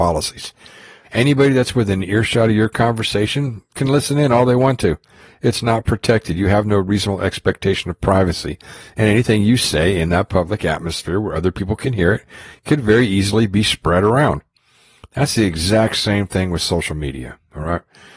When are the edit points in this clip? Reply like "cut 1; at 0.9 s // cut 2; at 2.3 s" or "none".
cut 1; at 1.0 s